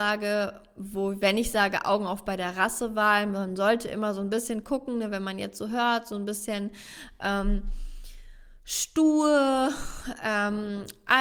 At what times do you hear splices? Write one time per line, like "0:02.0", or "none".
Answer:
none